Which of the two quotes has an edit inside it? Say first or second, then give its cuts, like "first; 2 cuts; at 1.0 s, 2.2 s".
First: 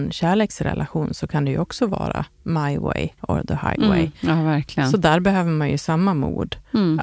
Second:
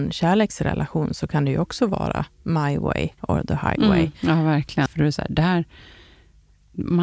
second; 1 cut; at 4.9 s